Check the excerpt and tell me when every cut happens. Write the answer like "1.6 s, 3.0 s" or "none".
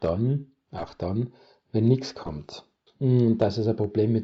2.9 s

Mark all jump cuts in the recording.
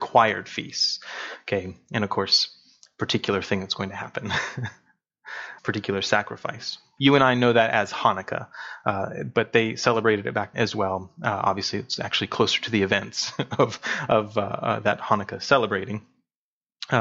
5.6 s, 7.0 s, 10.5 s

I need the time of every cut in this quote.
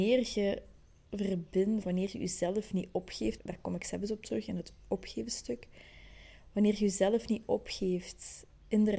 1.8 s, 3.4 s

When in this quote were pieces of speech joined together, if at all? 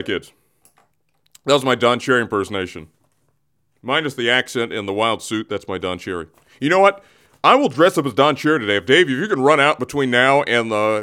none

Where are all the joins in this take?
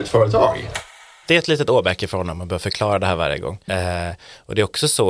3.7 s

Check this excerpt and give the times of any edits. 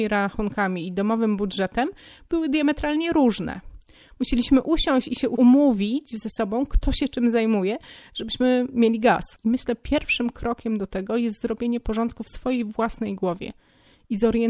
9.4 s

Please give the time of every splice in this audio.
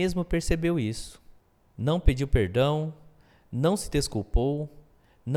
none

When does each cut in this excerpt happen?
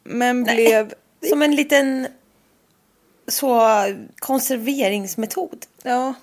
1.1 s, 4.1 s

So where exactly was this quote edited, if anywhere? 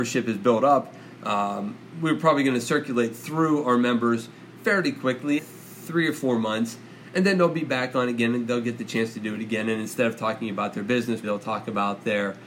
1.9 s, 5.4 s, 11.2 s

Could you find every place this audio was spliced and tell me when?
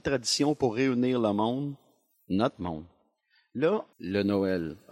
3.9 s

